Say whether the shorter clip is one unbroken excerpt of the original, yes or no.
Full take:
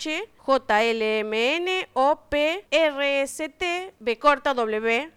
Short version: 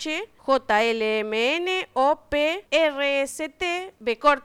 yes